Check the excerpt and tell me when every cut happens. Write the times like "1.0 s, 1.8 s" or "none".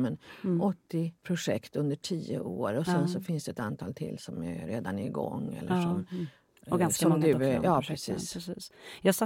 1.2 s